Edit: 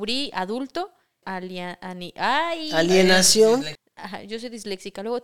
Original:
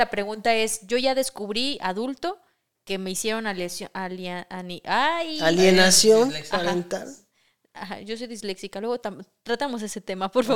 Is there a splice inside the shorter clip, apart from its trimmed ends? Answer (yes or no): yes